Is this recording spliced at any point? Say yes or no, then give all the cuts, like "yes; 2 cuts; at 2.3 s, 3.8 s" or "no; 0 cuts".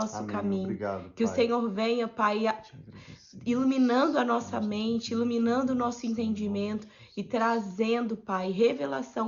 no; 0 cuts